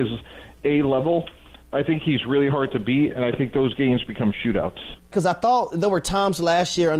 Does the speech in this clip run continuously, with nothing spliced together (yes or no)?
no